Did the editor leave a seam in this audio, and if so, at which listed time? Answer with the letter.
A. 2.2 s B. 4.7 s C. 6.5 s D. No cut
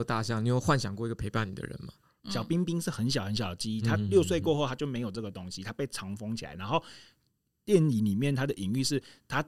A